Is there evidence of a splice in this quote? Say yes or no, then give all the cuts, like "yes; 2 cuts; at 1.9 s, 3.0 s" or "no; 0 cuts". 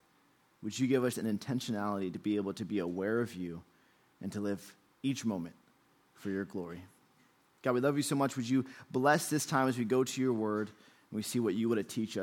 yes; 1 cut; at 1.1 s